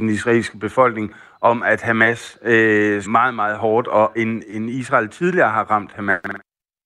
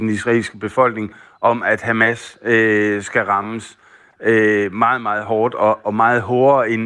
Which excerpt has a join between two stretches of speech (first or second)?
first